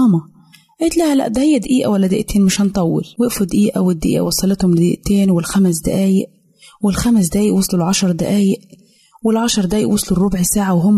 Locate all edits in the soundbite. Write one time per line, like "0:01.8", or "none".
0:03.1

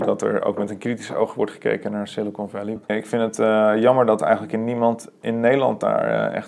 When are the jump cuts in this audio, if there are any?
0:02.9

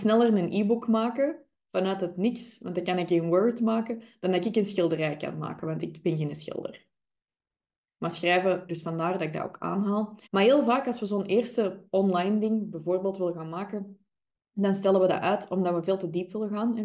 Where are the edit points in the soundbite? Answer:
0:08.7
0:10.3

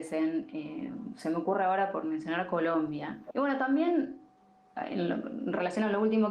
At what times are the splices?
0:03.3

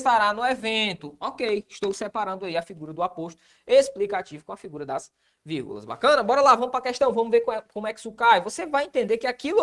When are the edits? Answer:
none

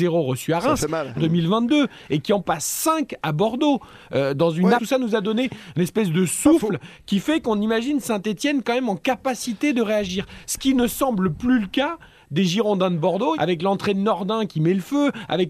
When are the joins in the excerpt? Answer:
0:01.1
0:04.8
0:13.3

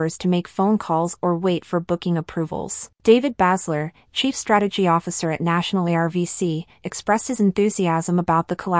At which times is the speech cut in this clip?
0:03.0

